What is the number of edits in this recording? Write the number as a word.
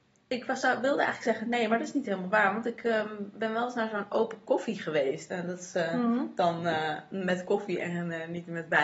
zero